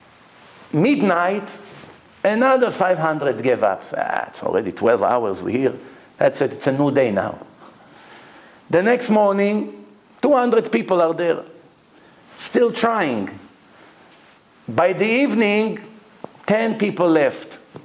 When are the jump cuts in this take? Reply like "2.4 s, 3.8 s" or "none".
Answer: none